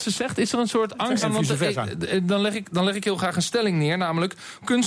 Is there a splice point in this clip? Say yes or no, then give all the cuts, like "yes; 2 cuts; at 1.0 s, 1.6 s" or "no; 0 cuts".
yes; 1 cut; at 1.2 s